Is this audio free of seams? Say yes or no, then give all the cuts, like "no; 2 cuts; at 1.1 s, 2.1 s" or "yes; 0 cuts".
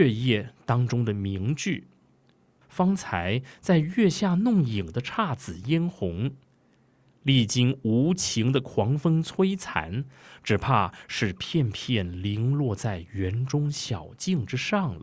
no; 1 cut; at 2.6 s